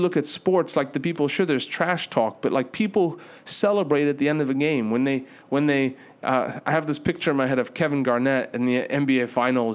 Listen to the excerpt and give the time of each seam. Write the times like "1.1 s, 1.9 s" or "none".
none